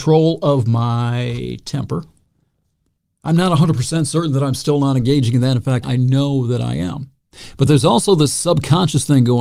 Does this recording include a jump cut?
yes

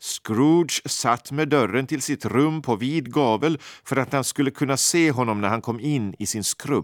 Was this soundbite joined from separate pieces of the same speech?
no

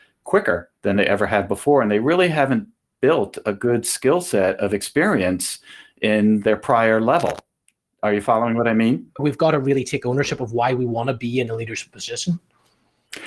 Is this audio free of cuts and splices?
no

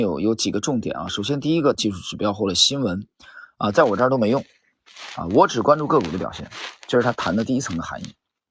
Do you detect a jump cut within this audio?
yes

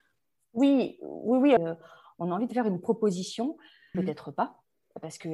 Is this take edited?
yes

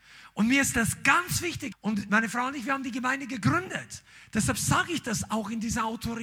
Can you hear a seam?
yes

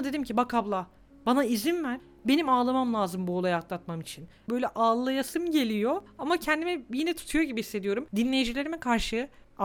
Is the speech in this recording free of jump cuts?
no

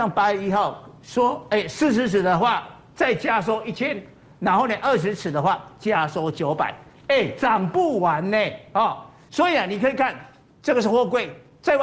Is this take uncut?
yes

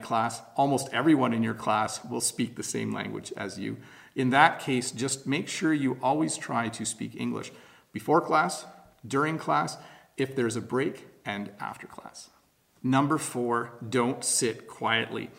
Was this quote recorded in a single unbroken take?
yes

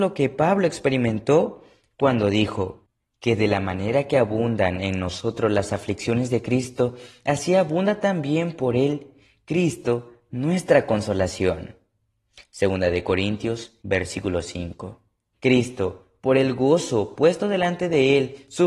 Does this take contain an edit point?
yes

